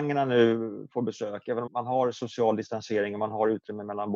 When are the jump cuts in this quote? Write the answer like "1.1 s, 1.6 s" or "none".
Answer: 1.7 s